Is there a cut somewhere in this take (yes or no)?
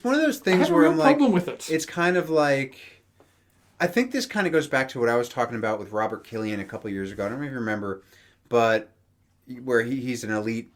no